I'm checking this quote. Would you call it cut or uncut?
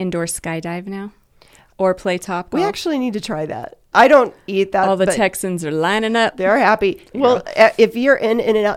cut